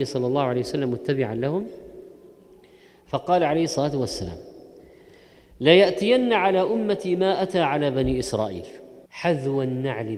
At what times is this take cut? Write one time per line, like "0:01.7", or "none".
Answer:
0:09.1